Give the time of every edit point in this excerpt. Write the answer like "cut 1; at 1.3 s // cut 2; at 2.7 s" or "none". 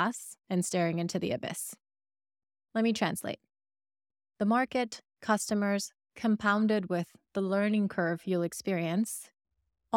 cut 1; at 6.1 s